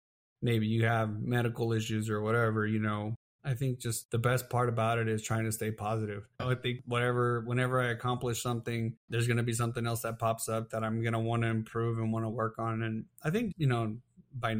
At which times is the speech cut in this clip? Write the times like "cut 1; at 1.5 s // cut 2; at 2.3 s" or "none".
cut 1; at 6.4 s // cut 2; at 9.0 s // cut 3; at 13.5 s